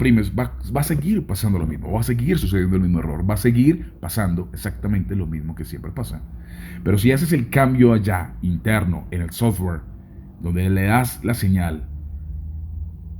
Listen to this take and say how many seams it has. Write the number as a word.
zero